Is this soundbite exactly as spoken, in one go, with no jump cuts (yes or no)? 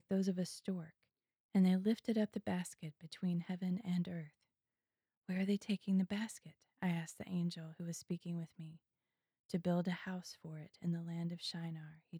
yes